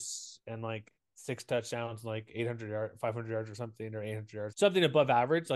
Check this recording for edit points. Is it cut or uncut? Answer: cut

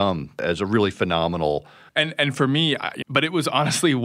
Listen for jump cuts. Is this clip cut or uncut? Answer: cut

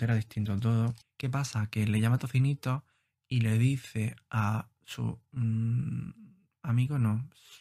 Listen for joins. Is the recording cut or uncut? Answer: cut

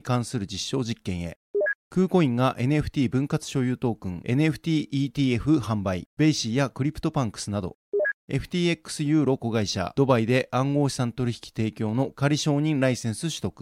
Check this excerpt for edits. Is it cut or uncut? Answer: uncut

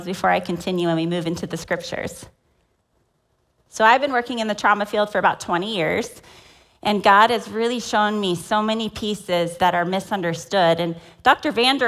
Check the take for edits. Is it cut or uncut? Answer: uncut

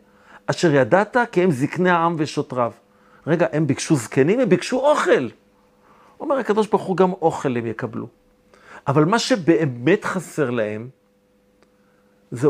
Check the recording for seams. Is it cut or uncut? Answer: uncut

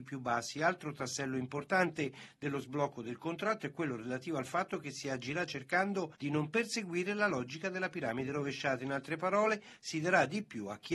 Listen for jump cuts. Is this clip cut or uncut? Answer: uncut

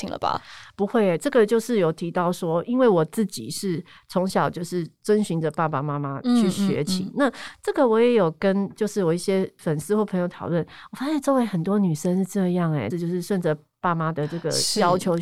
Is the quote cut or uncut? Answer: cut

